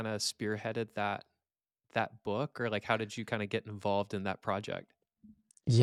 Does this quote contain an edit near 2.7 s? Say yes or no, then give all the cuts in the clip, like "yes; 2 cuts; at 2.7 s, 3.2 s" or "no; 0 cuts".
no; 0 cuts